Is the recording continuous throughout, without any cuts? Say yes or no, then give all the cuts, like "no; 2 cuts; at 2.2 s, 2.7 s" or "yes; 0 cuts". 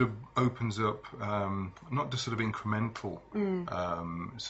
yes; 0 cuts